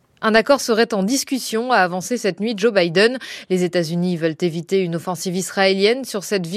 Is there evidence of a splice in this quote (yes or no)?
no